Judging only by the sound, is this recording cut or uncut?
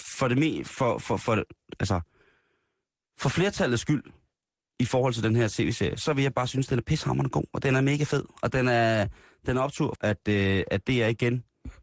cut